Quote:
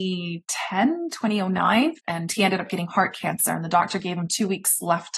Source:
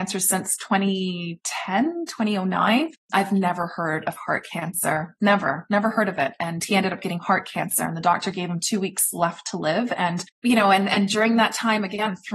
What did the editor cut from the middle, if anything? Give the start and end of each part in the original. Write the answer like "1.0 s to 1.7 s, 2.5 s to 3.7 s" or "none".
3.0 s to 6.4 s

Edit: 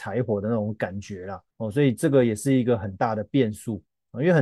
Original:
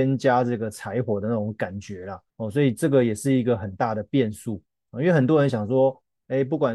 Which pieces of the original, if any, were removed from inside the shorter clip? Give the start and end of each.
none

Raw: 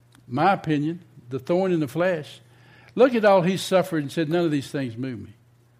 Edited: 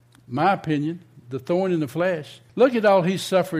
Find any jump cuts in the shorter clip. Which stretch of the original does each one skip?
2.5 s to 2.9 s

